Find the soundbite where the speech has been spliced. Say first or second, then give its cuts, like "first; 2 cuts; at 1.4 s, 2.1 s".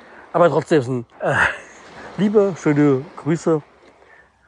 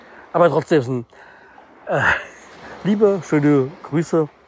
first; 1 cut; at 1.1 s